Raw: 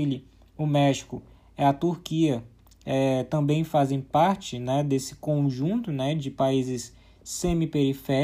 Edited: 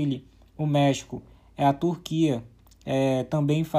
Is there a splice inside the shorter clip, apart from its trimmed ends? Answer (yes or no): no